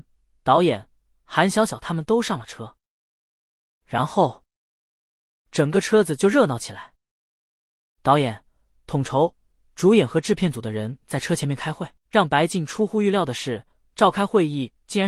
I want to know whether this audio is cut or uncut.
uncut